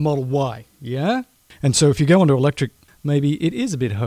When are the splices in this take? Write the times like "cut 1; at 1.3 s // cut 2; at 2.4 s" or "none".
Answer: cut 1; at 1.5 s // cut 2; at 2.9 s